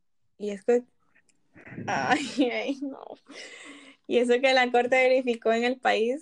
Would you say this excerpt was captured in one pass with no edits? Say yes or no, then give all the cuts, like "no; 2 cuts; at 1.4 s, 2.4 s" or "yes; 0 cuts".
yes; 0 cuts